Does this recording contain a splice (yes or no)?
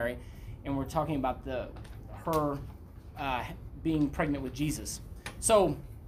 no